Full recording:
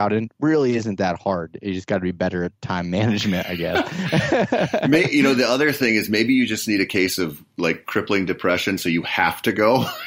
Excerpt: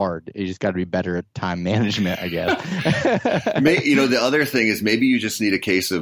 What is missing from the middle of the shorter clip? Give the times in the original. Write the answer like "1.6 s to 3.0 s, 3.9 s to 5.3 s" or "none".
none